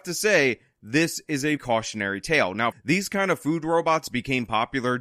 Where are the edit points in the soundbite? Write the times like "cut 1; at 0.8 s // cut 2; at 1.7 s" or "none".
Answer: cut 1; at 1.6 s // cut 2; at 2.7 s